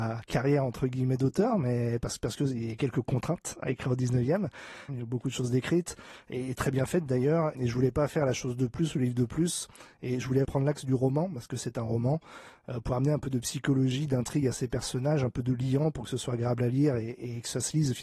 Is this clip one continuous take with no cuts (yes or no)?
no